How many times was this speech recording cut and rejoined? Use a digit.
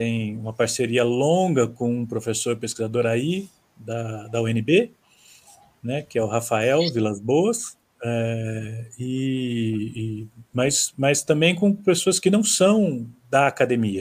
1